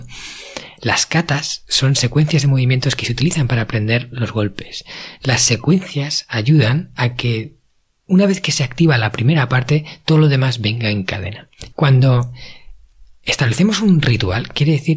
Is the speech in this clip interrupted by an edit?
yes; 1 cut; at 11.7 s

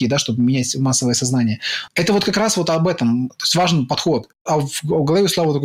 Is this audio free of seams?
no; 2 cuts; at 1.9 s, 3.3 s

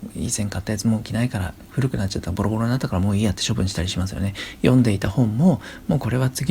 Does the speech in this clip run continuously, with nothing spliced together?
yes; 0 cuts

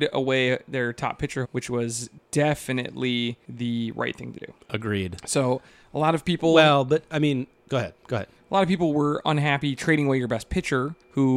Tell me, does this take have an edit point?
yes; 1 cut; at 1.4 s

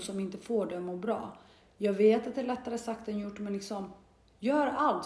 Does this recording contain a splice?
no; 0 cuts

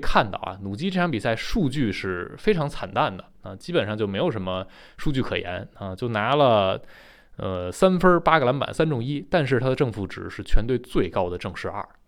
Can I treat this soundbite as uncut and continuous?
no; 1 cut; at 8.7 s

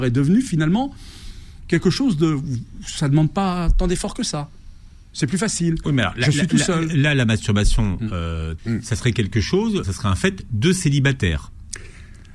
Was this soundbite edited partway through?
yes; 2 cuts; at 8.6 s, 9.8 s

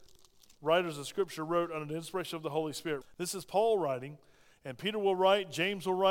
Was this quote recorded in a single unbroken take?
no; 1 cut; at 3.0 s

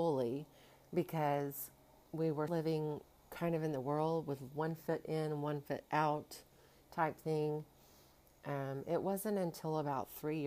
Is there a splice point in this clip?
yes; 1 cut; at 2.5 s

